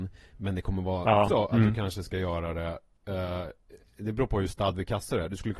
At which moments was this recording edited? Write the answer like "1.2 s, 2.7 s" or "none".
1.3 s